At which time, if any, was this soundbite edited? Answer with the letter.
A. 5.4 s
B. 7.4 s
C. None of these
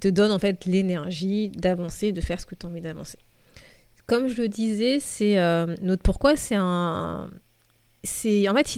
C